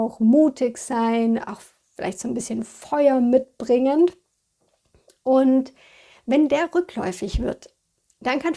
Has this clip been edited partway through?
no; 0 cuts

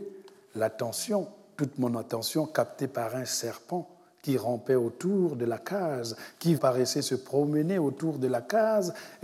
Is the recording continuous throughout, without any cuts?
no; 1 cut; at 6.6 s

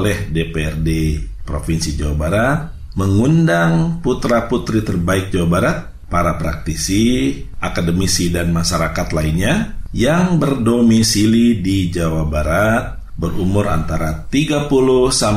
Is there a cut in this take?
no; 0 cuts

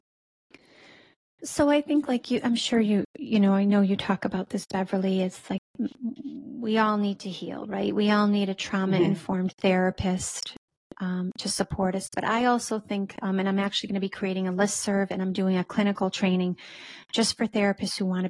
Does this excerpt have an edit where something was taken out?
no; 0 cuts

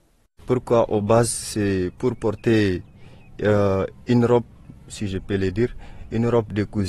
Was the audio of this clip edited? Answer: no; 0 cuts

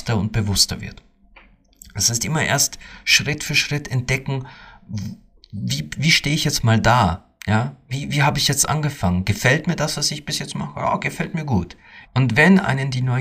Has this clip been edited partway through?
yes; 1 cut; at 12.0 s

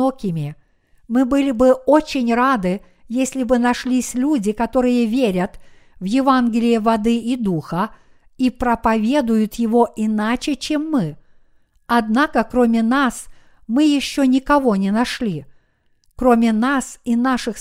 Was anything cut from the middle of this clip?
yes; 1 cut; at 16.0 s

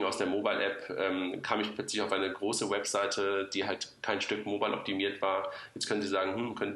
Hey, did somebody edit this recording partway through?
no; 0 cuts

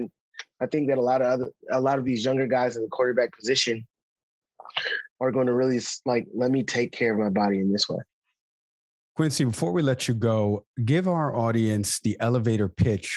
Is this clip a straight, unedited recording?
yes; 0 cuts

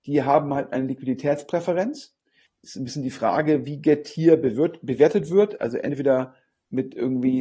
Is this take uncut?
no; 1 cut; at 2.5 s

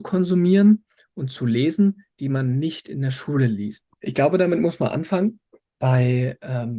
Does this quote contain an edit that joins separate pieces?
yes; 1 cut; at 3.8 s

